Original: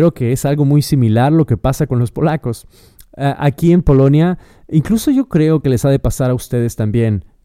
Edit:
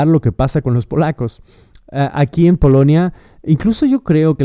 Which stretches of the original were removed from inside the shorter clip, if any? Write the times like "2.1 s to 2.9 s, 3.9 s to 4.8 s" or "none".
none